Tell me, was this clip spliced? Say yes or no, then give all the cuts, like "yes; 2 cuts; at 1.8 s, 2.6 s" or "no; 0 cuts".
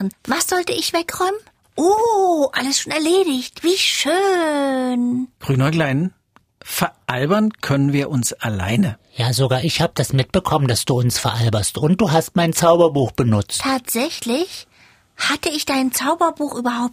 no; 0 cuts